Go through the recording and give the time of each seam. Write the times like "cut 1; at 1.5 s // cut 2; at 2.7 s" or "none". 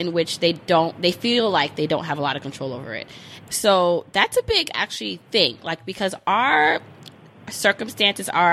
cut 1; at 3.5 s